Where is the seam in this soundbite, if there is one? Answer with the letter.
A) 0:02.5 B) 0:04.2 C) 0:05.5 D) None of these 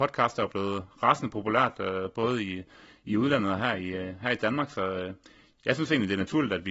D